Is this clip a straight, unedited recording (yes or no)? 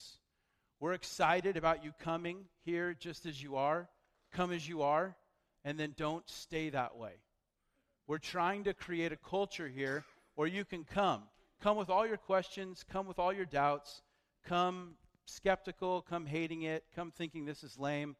yes